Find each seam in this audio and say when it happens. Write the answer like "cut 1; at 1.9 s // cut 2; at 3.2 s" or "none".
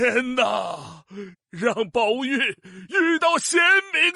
cut 1; at 1.3 s